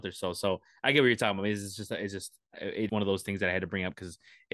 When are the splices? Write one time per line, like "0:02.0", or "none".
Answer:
0:02.9